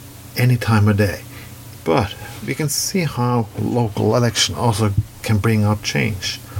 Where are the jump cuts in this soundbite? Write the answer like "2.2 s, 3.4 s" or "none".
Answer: 1.8 s